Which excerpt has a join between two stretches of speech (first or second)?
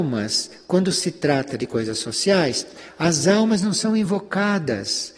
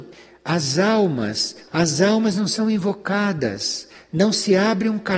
second